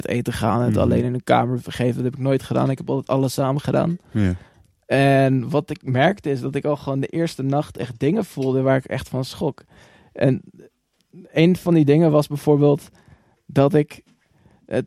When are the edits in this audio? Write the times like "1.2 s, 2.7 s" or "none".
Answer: none